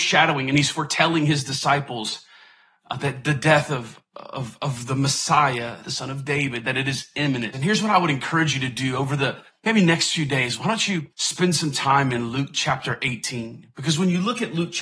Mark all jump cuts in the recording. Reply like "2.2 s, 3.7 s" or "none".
5.8 s, 7.5 s, 11.1 s